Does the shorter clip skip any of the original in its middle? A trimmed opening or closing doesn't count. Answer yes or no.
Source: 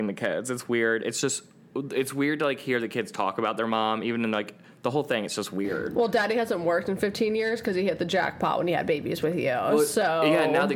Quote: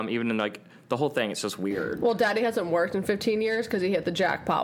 no